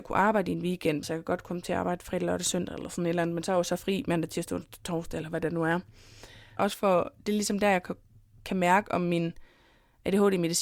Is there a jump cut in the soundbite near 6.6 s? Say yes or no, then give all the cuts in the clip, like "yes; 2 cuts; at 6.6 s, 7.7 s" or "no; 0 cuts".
yes; 2 cuts; at 1.0 s, 6.6 s